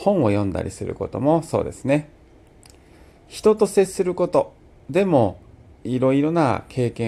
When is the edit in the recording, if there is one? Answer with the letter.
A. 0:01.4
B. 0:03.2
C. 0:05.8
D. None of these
C